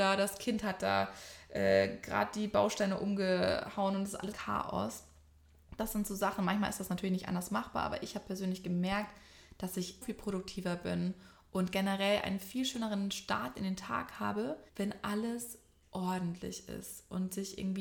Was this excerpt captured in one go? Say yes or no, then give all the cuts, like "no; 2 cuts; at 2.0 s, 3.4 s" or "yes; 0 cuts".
no; 3 cuts; at 4.3 s, 10.0 s, 14.7 s